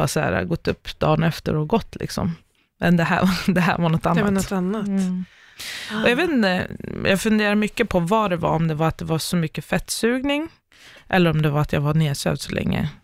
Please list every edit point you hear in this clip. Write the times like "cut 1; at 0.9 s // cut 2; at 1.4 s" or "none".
none

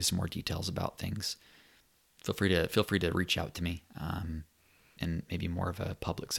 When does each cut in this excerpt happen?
cut 1; at 5.0 s

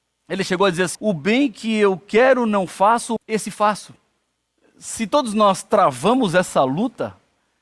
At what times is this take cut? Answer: cut 1; at 0.9 s // cut 2; at 3.2 s

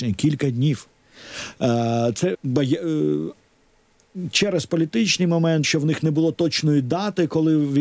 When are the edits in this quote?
cut 1; at 2.3 s // cut 2; at 5.6 s

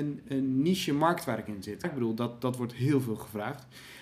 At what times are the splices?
cut 1; at 1.8 s

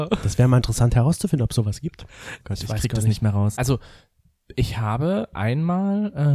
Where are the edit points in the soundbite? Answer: cut 1; at 2.4 s // cut 2; at 3.6 s

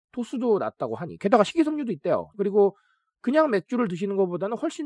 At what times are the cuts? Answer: cut 1; at 2.3 s

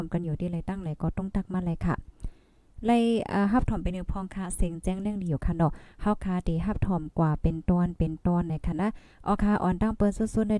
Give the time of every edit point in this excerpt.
none

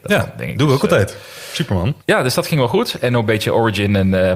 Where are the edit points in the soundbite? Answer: cut 1; at 2.0 s

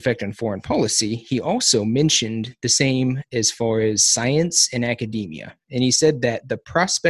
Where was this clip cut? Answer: none

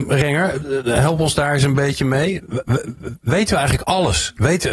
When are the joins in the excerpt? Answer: none

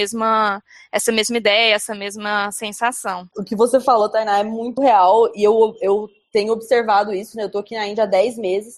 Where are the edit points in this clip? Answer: cut 1; at 4.8 s

